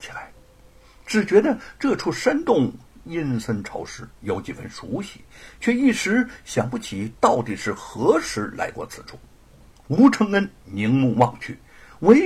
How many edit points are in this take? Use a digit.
1